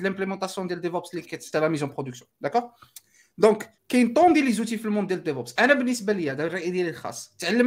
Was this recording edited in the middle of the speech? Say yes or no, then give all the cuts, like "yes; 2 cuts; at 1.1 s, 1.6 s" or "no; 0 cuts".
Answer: yes; 2 cuts; at 1.5 s, 3.8 s